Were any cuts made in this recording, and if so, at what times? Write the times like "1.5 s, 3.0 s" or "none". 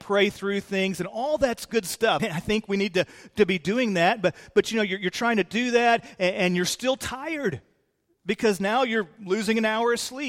2.2 s